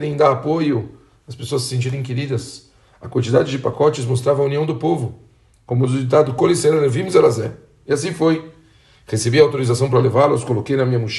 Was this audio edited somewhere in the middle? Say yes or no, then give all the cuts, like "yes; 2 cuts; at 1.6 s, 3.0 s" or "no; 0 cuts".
no; 0 cuts